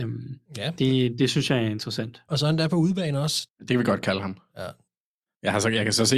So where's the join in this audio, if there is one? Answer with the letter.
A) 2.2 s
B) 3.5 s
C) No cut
B